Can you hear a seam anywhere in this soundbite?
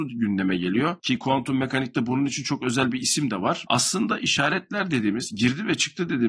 yes; 1 cut; at 3.6 s

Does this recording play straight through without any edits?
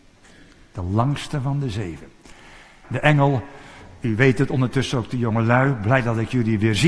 no; 1 cut; at 2.8 s

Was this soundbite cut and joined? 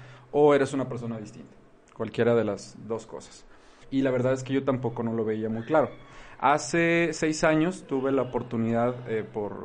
yes; 1 cut; at 3.8 s

